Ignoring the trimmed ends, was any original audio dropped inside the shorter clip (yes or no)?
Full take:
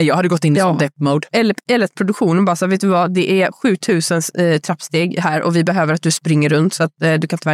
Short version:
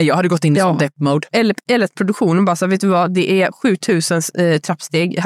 no